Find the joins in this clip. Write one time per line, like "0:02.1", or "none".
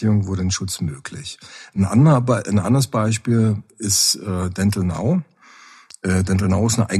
none